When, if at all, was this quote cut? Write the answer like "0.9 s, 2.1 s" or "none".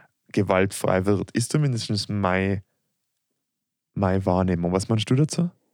none